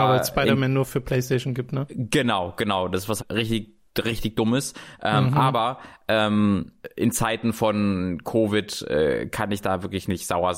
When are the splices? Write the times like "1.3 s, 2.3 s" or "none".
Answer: 3.2 s